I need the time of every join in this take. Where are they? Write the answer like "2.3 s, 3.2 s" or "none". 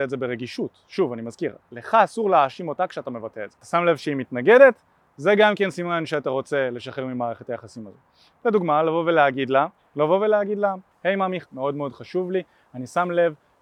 9.8 s, 11.4 s